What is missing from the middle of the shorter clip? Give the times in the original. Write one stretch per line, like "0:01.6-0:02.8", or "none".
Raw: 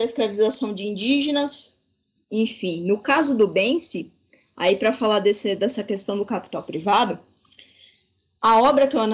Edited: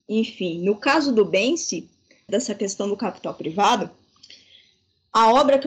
0:04.5-0:05.6